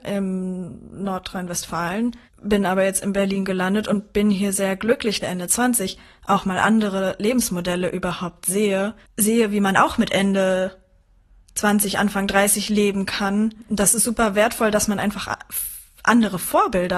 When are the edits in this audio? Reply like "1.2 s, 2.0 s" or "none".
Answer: 5.2 s